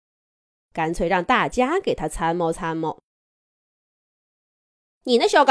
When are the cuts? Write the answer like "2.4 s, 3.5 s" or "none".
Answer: none